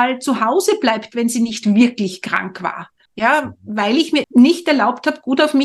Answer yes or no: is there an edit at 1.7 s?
no